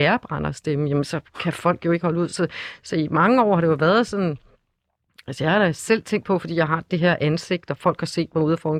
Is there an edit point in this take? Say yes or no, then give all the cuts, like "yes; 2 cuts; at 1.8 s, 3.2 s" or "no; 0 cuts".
no; 0 cuts